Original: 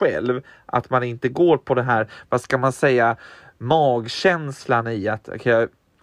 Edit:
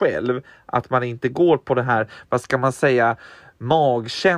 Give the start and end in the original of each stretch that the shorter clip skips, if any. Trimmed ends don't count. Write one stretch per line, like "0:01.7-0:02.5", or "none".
none

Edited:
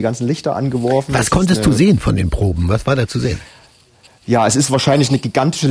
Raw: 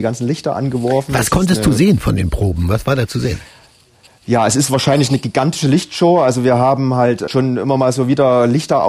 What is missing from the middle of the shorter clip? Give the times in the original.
none

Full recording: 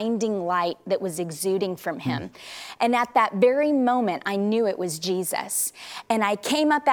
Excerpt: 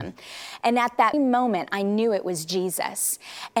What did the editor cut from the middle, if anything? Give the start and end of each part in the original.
0:03.3-0:03.7

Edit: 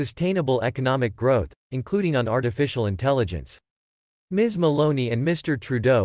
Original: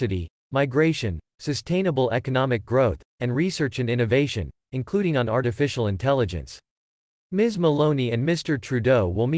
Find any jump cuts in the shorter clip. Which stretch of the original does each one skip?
0:03.1-0:04.6

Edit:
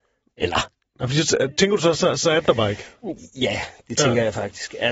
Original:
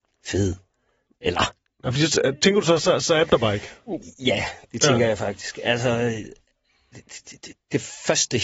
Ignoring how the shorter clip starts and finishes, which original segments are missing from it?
none

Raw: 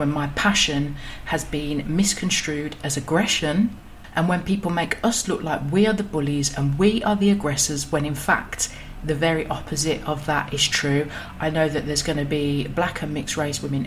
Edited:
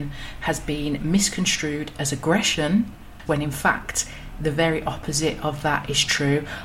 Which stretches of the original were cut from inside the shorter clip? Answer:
0:04.1-0:07.9

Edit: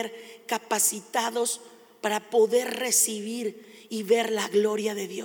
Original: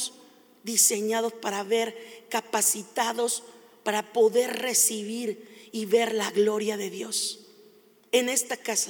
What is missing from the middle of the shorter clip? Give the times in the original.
none

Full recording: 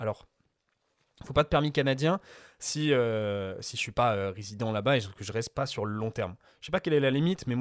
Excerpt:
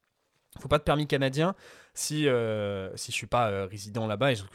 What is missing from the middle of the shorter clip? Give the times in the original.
none

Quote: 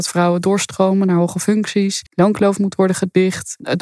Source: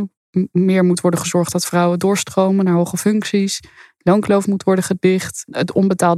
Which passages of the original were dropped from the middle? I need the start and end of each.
0:03.6-0:03.9

